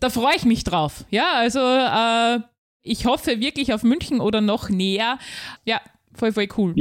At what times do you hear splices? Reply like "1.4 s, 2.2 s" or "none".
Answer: 5.6 s